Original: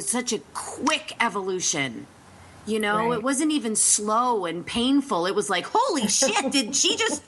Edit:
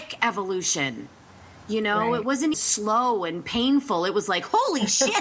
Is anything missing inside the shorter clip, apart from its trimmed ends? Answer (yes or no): yes